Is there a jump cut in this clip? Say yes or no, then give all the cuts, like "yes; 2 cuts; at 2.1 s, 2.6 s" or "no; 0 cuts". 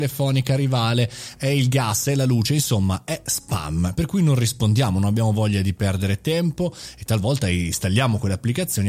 no; 0 cuts